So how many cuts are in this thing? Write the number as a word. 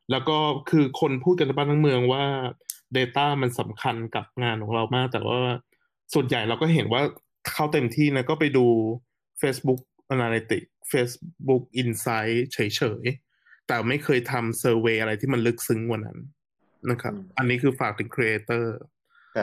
zero